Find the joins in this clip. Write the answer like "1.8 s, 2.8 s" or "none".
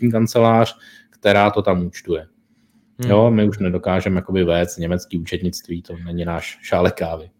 none

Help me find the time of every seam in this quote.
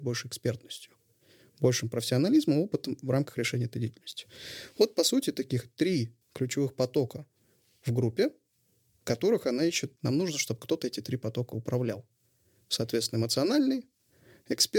6.2 s, 10.0 s

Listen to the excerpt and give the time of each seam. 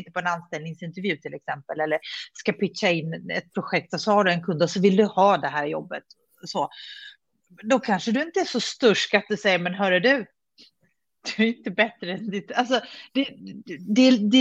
none

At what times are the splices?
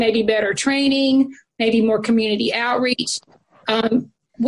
none

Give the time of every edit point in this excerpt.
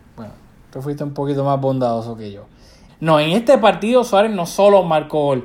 2.9 s

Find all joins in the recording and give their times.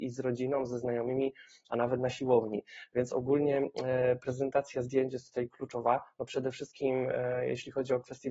none

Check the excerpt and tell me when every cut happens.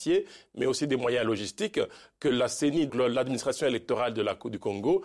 2.9 s

